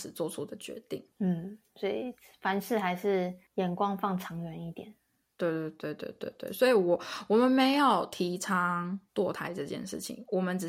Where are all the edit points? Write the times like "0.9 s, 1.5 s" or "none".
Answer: none